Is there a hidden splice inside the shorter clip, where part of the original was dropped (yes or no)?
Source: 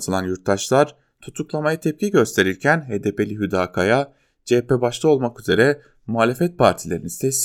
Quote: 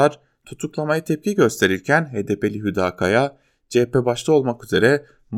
no